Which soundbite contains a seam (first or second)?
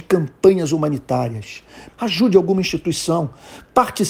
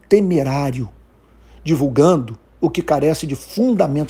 first